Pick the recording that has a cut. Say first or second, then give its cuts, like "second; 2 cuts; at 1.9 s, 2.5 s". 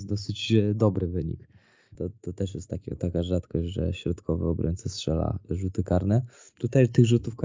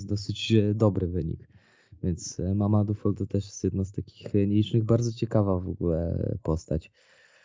first; 1 cut; at 1.9 s